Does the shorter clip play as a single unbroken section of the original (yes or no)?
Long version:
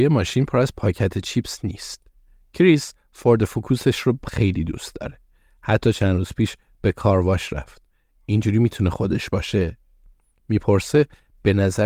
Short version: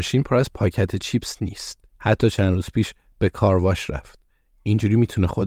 no